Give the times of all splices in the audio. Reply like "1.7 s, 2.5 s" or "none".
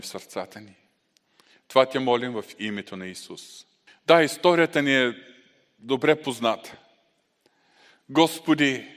3.9 s